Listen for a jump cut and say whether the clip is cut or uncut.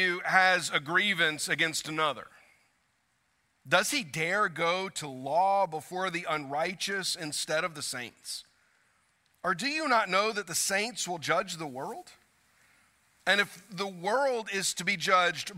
uncut